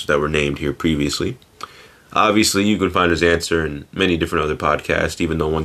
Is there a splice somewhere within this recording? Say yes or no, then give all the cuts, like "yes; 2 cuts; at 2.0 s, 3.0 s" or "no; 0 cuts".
no; 0 cuts